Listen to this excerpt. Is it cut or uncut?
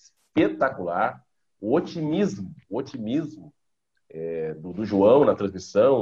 uncut